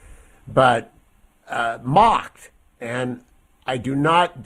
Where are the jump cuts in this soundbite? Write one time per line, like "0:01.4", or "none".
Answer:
none